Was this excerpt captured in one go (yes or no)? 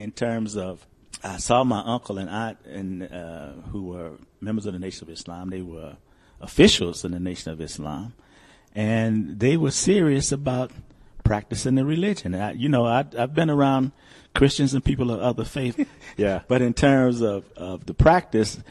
no